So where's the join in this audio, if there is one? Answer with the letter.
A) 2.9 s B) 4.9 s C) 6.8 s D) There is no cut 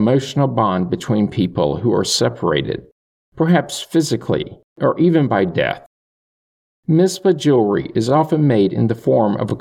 D